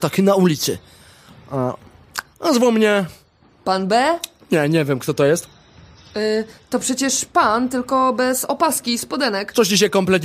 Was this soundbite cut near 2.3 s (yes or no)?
yes